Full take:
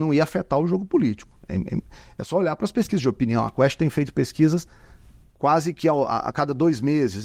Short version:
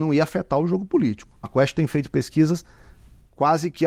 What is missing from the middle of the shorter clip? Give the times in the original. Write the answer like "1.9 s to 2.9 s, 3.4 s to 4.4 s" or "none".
1.4 s to 3.5 s